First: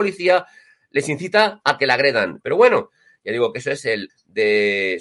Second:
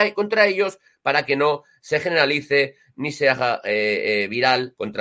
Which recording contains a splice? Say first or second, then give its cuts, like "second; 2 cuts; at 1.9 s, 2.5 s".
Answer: first; 2 cuts; at 2.4 s, 4.1 s